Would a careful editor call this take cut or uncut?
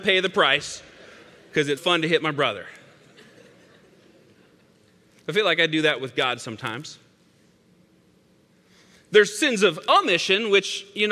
cut